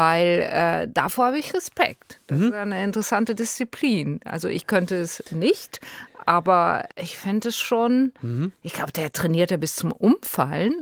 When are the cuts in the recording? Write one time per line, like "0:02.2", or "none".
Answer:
0:06.9